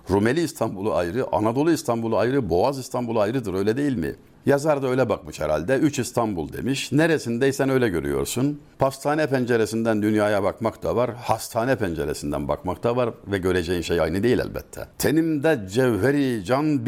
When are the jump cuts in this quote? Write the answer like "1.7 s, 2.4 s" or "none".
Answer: none